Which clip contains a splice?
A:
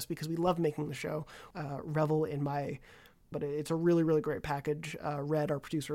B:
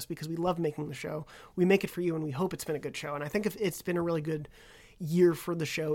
A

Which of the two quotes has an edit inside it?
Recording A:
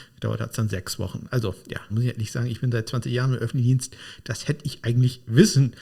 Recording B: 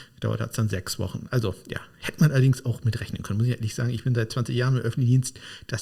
A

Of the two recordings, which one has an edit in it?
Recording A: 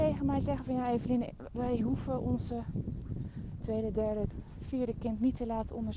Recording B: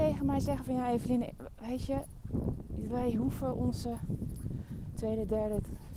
A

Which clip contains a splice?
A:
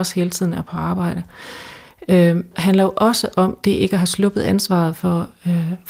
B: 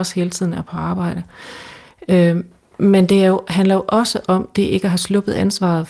A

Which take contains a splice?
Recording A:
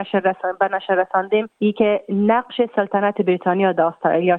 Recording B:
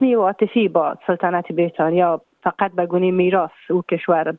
A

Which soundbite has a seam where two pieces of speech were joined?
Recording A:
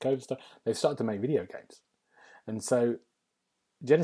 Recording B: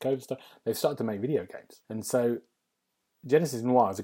B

